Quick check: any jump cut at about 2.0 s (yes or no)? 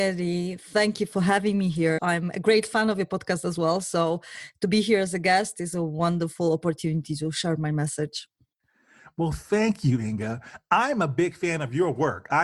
yes